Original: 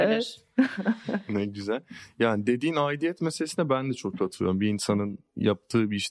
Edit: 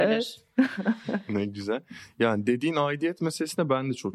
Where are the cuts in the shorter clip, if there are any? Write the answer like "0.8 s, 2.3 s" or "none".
none